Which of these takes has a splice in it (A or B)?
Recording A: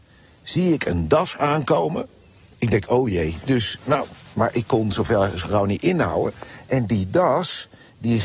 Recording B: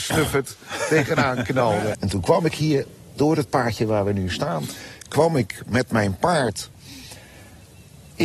B